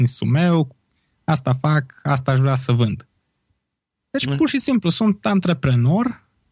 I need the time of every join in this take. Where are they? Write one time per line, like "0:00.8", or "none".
none